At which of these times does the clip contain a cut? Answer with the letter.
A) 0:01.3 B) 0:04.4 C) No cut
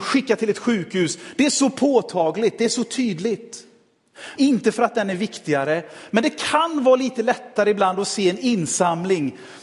B